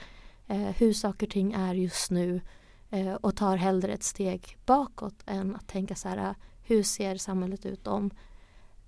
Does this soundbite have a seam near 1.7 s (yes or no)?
no